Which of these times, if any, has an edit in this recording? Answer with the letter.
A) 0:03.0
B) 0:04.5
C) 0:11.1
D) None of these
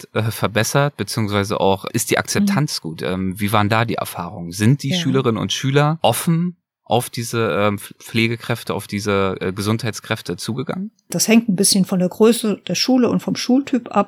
C